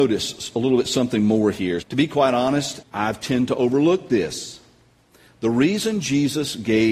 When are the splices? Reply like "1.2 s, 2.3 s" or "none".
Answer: 1.8 s, 2.8 s

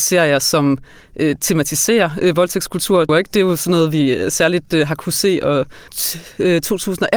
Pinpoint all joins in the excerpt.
3.1 s, 5.9 s

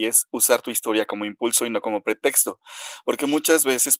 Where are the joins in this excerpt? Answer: none

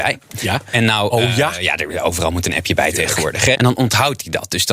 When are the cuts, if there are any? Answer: 3.5 s

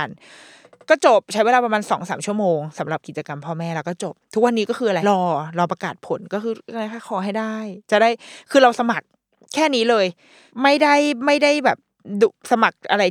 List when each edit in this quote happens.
5.0 s

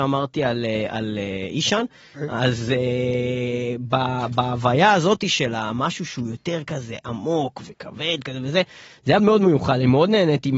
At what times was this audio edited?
2.1 s, 9.2 s

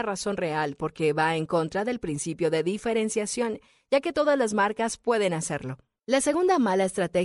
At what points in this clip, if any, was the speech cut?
6.0 s

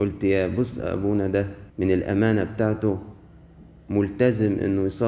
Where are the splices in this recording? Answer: 1.7 s

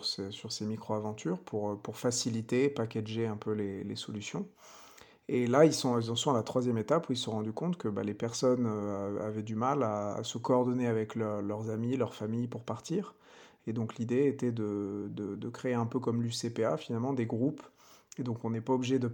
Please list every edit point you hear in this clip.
none

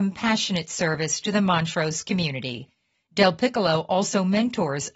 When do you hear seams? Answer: 2.9 s

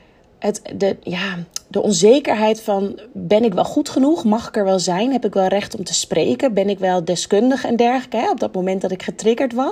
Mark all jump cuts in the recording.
none

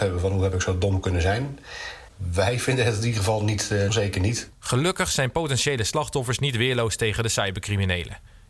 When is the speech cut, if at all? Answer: 3.9 s

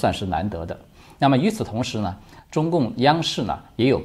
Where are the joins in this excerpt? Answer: none

